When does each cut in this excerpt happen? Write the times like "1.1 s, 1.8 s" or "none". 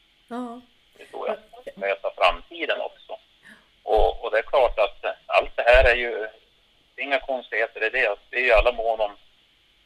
1.8 s